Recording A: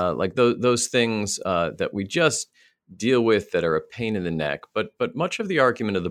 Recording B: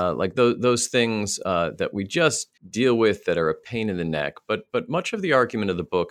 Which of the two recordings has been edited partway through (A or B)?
B